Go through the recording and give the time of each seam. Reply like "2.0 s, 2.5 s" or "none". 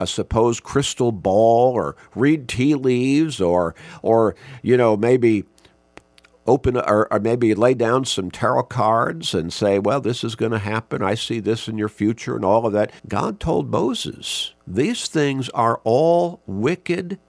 13.0 s, 14.6 s